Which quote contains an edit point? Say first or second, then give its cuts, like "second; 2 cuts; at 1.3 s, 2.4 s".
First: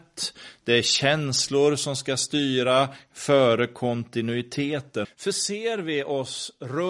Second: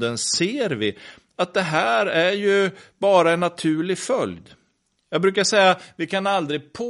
first; 1 cut; at 5.0 s